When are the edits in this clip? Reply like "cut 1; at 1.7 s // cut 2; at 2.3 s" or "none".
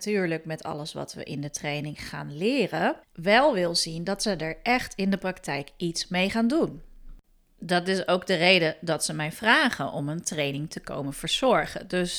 cut 1; at 3.0 s